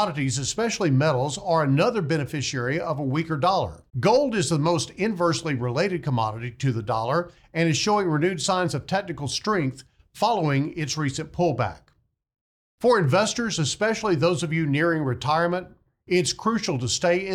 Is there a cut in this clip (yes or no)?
yes